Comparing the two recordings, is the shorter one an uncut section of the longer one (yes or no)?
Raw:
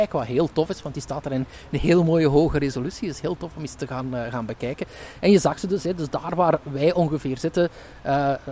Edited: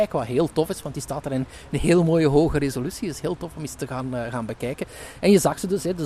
yes